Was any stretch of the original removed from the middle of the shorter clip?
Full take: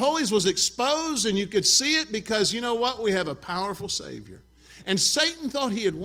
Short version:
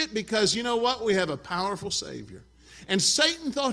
no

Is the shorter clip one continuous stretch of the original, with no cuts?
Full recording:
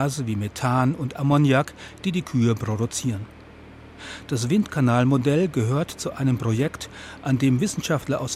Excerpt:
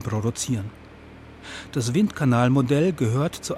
yes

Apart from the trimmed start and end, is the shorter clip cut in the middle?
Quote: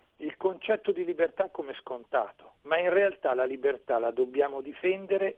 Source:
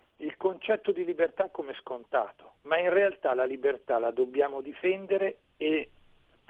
no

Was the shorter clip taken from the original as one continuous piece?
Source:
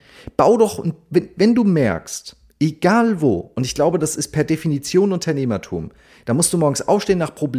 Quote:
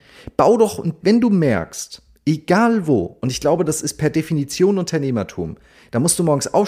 no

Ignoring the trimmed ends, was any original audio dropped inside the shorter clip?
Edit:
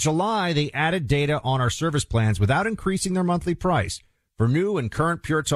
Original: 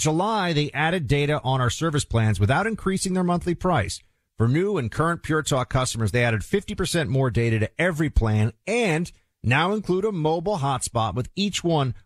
no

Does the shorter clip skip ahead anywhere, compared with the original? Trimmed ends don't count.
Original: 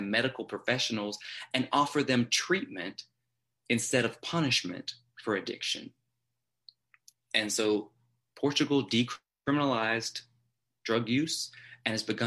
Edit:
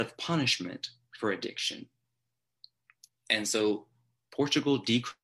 no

